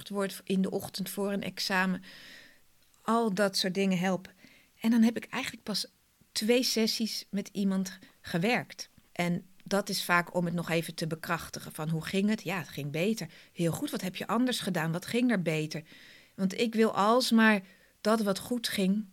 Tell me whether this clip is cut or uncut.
cut